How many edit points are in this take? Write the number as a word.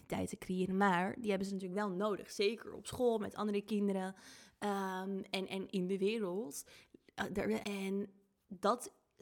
two